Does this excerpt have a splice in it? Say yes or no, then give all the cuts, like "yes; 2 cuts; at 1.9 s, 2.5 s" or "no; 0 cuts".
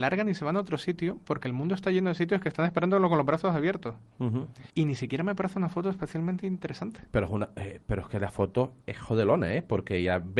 yes; 1 cut; at 4.7 s